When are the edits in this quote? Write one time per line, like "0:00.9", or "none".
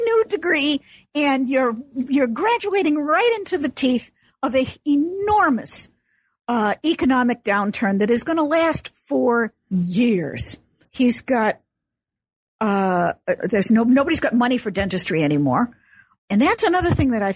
0:10.8
0:13.4
0:16.2